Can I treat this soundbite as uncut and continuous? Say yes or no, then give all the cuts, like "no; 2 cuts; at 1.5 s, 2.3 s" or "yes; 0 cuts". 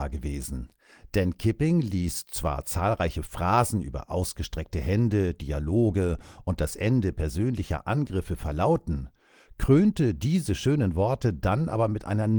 yes; 0 cuts